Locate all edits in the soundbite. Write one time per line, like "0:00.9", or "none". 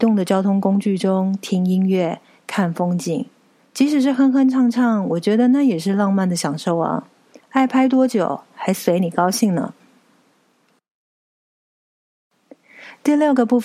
0:07.4